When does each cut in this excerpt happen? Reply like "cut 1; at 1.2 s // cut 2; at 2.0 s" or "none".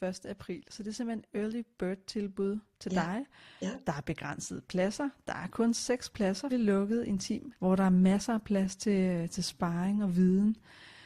cut 1; at 6.5 s // cut 2; at 7.6 s